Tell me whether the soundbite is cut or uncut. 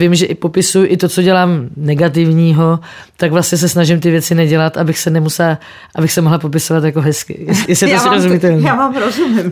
cut